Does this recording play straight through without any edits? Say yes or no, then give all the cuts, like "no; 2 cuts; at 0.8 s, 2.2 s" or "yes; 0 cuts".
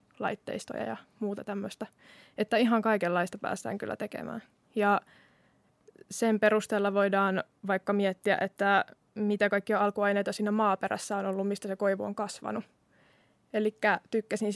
no; 1 cut; at 4.6 s